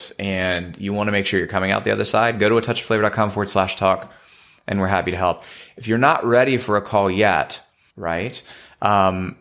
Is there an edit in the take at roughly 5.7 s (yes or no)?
no